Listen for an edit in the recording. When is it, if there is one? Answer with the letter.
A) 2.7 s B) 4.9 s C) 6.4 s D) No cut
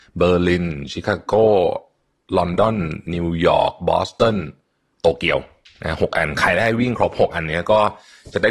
D